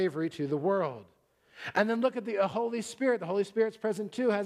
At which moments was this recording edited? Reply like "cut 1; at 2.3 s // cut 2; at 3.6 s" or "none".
none